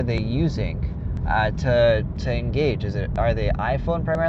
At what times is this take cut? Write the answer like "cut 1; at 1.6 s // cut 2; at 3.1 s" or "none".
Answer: none